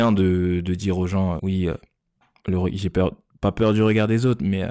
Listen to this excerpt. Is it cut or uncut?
cut